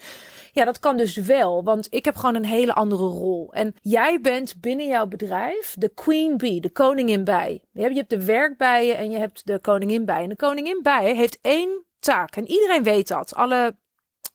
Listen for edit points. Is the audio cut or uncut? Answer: cut